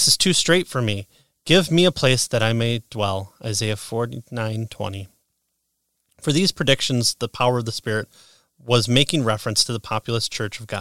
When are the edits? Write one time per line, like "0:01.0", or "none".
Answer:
none